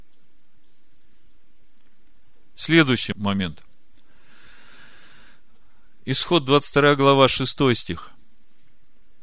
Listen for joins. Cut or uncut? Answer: uncut